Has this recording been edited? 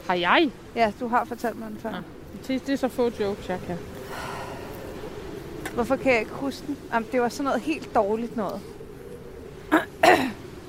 no; 0 cuts

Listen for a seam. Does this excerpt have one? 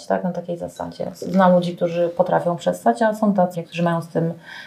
yes; 1 cut; at 3.5 s

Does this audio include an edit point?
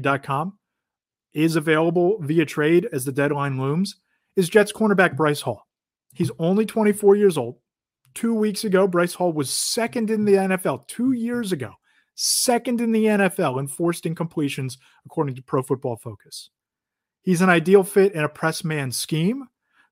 yes; 1 cut; at 6.0 s

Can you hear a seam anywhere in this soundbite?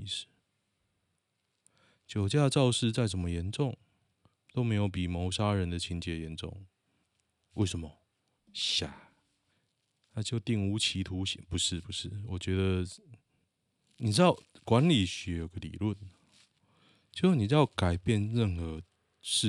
yes; 1 cut; at 8.4 s

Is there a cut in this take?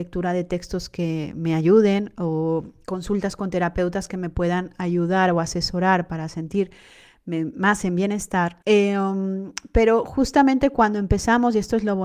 yes; 1 cut; at 8.6 s

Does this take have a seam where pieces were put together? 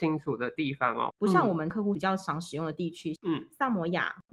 yes; 2 cuts; at 1.1 s, 3.2 s

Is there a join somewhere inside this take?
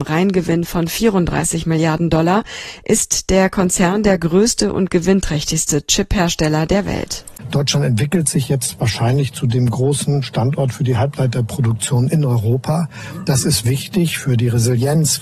no; 0 cuts

